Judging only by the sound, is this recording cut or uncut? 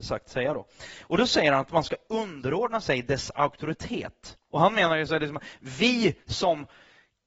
uncut